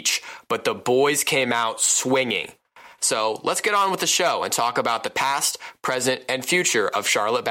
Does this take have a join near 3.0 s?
yes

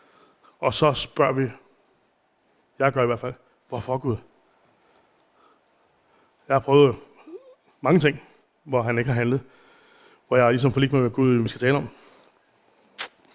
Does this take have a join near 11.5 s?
yes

